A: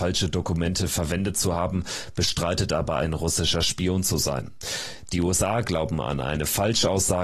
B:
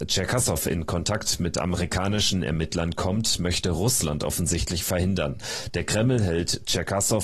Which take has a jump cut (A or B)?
B